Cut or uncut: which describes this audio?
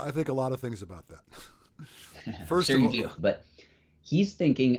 cut